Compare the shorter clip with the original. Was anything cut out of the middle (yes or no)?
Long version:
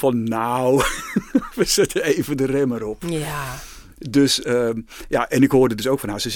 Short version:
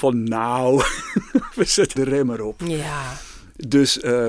yes